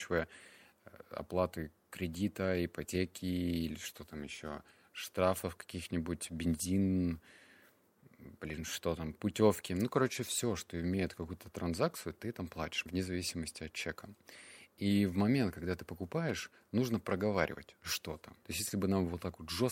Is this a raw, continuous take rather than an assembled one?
no; 2 cuts; at 12.9 s, 18.4 s

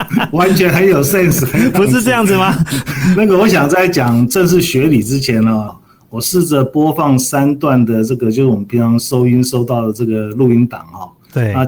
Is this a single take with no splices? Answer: no; 1 cut; at 5.7 s

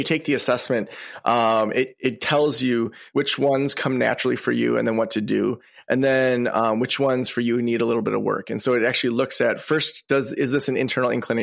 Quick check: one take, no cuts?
no; 1 cut; at 3.1 s

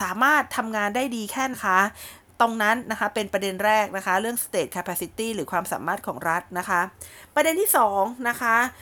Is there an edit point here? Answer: yes; 1 cut; at 1.5 s

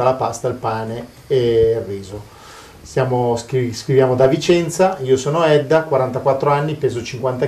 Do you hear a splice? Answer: no; 0 cuts

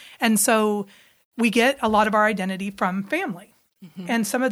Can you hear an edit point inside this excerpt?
no; 0 cuts

